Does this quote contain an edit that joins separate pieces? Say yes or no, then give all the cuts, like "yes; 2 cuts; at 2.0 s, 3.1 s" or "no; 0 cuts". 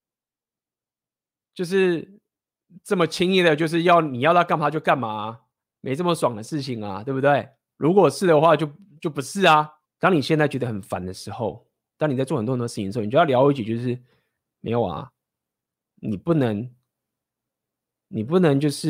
yes; 1 cut; at 9.8 s